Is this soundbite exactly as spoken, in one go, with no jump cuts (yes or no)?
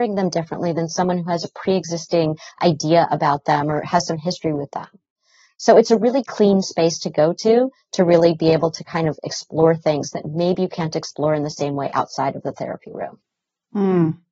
yes